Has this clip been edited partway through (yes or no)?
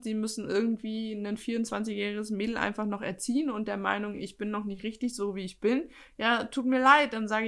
no